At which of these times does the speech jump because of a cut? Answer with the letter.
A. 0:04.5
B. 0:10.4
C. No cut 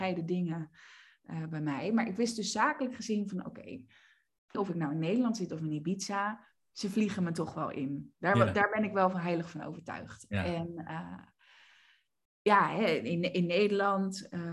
A